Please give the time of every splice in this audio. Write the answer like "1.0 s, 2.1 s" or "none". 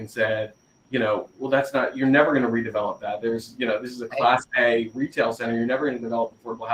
none